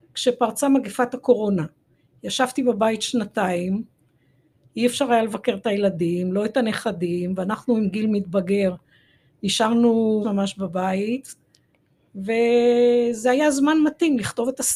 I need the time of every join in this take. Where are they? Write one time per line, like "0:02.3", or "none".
0:10.2